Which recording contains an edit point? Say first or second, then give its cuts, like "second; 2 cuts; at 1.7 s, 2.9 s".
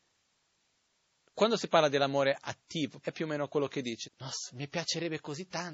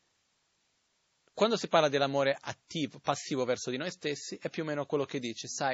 first; 2 cuts; at 3.0 s, 4.0 s